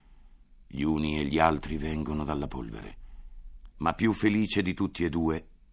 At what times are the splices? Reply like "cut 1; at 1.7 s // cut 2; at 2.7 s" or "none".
cut 1; at 3.7 s